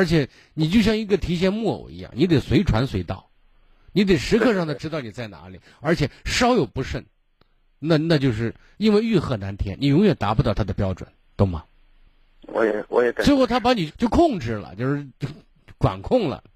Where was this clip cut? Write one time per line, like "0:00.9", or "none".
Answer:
0:08.7
0:13.9